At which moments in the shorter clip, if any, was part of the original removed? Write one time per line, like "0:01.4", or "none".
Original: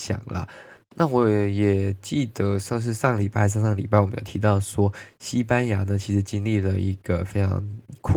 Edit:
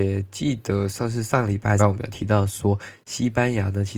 0:01.8